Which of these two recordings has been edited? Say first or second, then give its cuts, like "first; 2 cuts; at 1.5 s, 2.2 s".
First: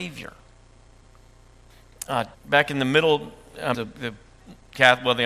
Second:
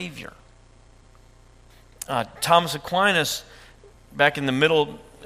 first; 2 cuts; at 2.3 s, 3.7 s